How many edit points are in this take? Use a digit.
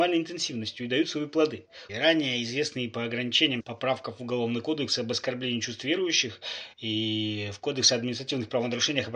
2